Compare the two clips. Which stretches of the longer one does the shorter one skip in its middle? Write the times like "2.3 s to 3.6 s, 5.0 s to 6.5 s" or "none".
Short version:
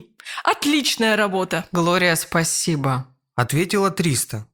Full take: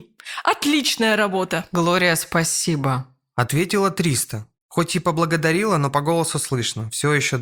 none